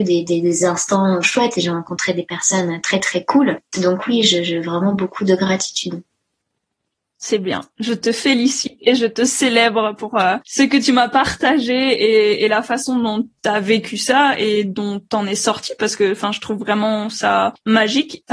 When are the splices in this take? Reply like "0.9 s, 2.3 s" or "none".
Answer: 1.2 s

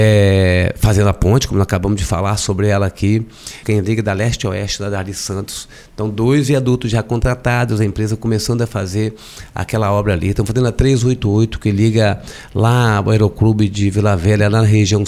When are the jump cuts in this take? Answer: 3.6 s

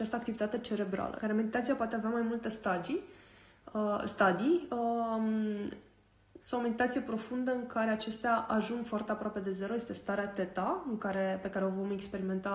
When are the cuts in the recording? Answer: 1.2 s, 6.4 s

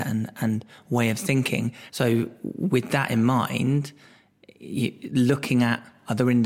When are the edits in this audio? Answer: 1.9 s

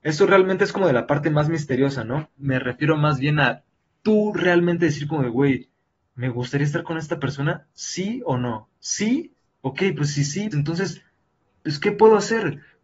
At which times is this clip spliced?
2.3 s, 10.5 s

